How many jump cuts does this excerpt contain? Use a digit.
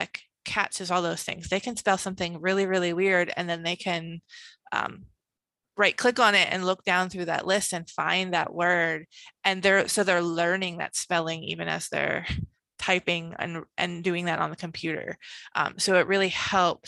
0